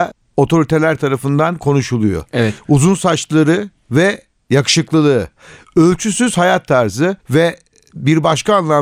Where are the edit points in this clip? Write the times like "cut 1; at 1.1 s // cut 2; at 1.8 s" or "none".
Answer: cut 1; at 7.2 s